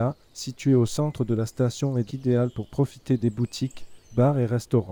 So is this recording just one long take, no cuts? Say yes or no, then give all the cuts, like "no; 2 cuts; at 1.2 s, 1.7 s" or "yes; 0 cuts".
no; 1 cut; at 2.1 s